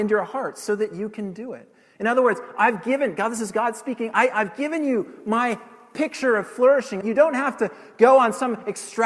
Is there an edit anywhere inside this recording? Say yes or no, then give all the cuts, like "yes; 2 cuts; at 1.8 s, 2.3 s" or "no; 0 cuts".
yes; 1 cut; at 7.0 s